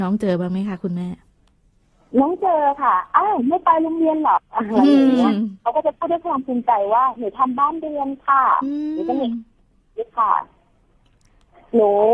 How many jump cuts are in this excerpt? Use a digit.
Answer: 1